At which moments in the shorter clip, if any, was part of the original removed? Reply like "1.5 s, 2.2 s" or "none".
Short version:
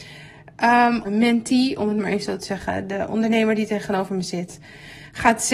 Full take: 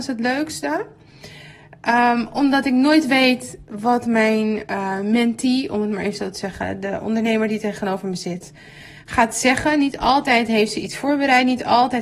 1.0 s